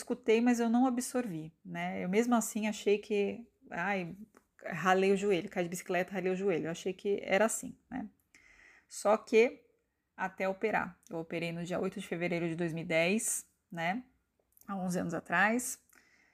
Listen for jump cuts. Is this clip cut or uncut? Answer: uncut